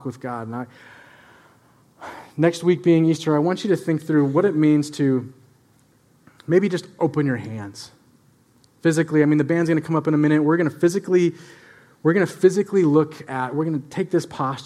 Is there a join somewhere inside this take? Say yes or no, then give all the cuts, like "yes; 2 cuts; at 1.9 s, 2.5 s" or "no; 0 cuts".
no; 0 cuts